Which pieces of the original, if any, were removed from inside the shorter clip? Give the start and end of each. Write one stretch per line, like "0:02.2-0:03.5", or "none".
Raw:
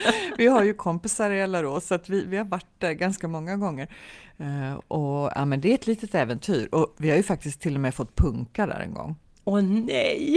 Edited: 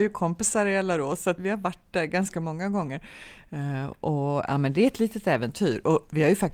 0:02.0-0:02.3